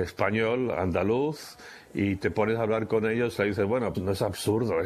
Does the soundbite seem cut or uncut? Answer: cut